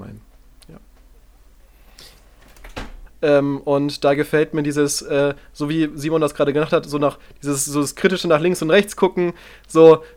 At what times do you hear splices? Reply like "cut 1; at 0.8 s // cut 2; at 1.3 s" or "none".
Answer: cut 1; at 3.1 s